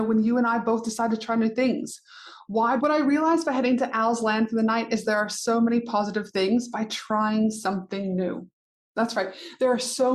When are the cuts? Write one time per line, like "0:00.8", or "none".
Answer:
0:02.8